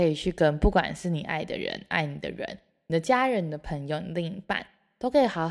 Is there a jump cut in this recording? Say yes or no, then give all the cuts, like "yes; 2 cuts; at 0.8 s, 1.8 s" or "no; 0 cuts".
no; 0 cuts